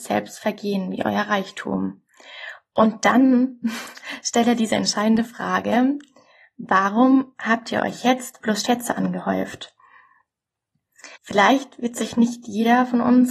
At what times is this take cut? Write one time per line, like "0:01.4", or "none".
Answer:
0:08.4
0:11.2